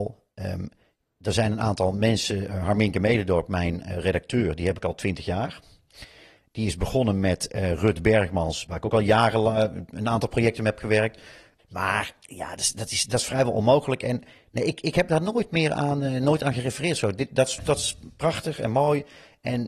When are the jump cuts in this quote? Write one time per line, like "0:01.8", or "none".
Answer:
0:08.7
0:11.6